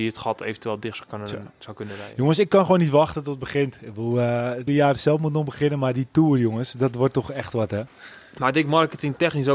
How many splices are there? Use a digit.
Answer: 1